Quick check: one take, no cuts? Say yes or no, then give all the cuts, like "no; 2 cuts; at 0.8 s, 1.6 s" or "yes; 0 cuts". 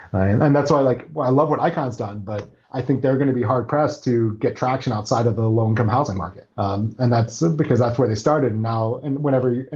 no; 1 cut; at 6.5 s